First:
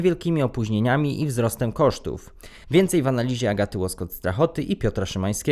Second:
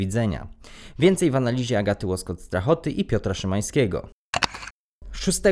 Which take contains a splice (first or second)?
first